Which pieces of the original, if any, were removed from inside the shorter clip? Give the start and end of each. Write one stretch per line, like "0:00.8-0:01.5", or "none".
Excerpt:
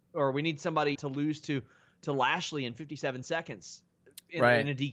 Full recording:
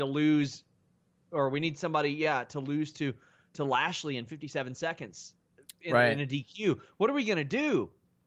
0:02.1-0:02.5